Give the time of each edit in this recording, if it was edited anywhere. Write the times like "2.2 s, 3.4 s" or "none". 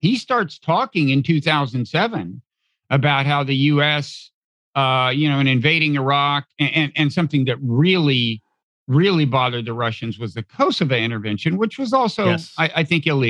none